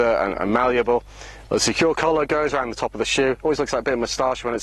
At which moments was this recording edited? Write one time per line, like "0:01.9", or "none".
0:01.4

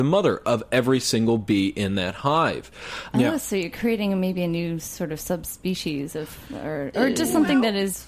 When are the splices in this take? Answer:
0:03.1

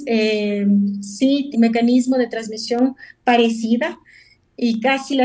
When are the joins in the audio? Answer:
0:01.5

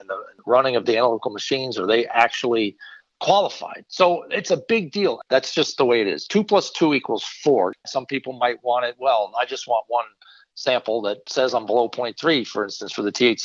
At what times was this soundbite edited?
0:05.3
0:07.8

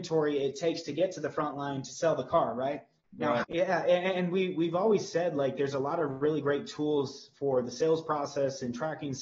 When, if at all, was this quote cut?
0:03.4

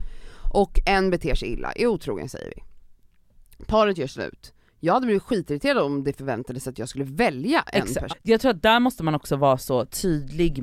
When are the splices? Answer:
0:08.1

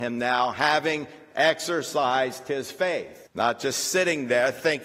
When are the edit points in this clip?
0:03.3

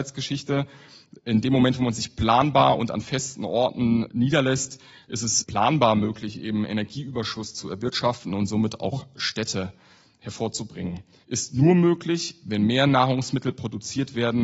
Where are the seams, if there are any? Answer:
0:04.1
0:05.4
0:11.2

